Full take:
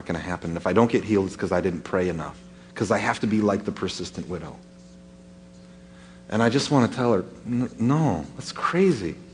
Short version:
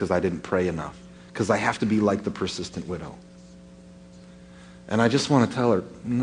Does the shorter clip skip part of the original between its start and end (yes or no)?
no